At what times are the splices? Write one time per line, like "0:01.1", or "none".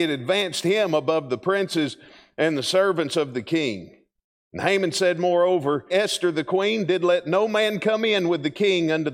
0:05.9